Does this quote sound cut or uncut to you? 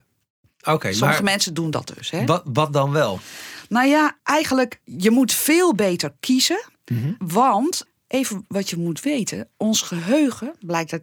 uncut